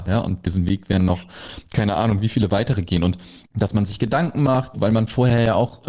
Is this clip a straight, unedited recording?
no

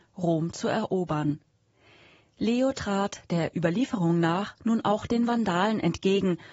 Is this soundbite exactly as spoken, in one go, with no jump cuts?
no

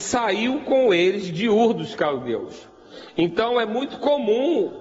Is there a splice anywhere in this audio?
no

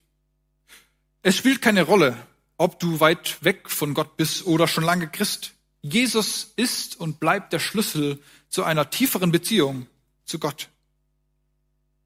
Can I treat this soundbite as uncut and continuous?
yes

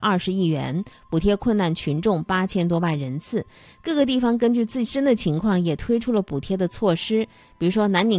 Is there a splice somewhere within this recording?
no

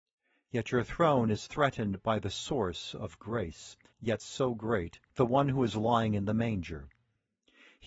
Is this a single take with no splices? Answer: no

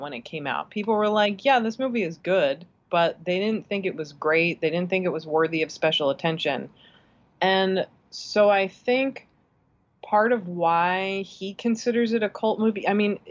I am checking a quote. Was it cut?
no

